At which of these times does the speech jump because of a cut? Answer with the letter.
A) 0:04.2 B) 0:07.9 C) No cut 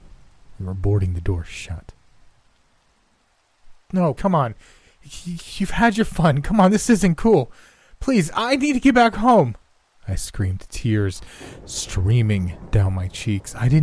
A